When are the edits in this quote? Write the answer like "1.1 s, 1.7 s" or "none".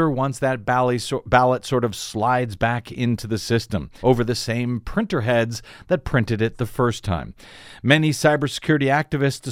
4.0 s

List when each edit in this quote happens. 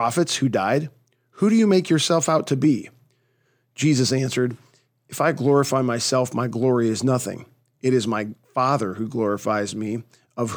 none

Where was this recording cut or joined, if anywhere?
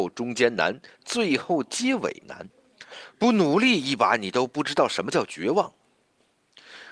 5.8 s

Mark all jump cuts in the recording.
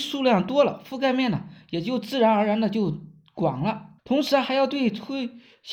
4.0 s

